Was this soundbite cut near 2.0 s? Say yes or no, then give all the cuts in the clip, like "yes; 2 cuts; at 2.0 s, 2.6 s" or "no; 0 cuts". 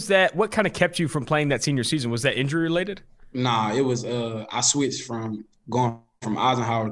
no; 0 cuts